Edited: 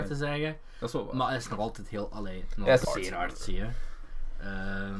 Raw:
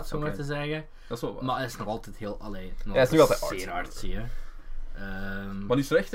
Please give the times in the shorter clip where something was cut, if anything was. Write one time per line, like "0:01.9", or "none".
0:02.8